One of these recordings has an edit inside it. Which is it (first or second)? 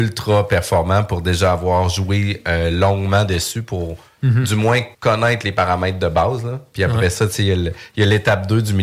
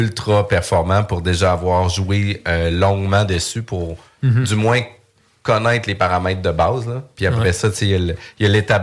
first